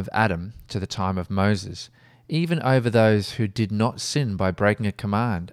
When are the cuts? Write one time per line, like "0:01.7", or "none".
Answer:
none